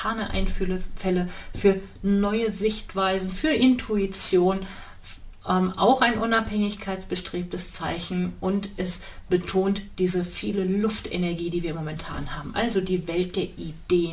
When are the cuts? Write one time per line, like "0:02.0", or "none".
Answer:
none